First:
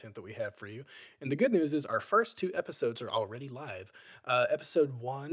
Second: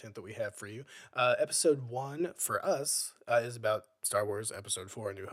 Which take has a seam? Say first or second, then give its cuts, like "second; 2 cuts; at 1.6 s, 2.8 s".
second; 1 cut; at 1.0 s